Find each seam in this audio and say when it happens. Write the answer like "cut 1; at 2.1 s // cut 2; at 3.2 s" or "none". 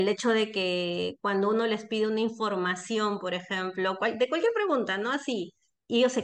none